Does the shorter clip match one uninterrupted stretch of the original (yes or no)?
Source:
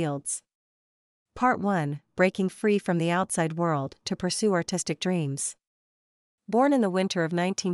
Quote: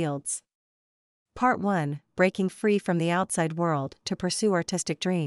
yes